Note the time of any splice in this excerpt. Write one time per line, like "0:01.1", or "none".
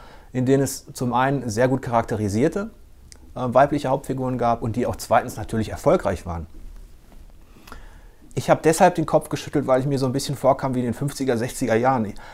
0:08.3